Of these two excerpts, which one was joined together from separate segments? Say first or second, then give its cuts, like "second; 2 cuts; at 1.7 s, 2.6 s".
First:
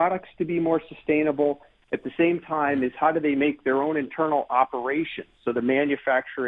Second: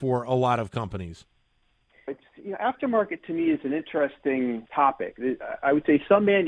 second; 2 cuts; at 2.1 s, 4.7 s